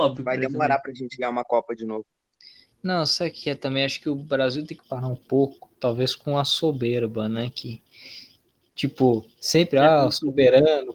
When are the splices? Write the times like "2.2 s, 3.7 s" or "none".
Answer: none